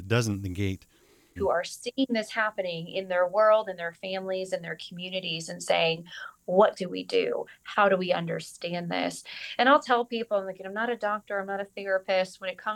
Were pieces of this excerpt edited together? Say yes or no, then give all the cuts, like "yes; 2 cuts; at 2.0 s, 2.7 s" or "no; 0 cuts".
yes; 1 cut; at 1.4 s